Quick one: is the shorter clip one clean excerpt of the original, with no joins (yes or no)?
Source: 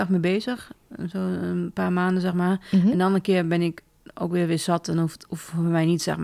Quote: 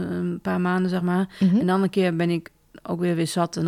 yes